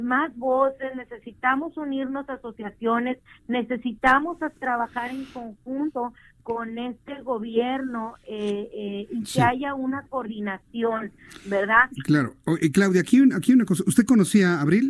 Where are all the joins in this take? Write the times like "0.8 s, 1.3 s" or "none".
none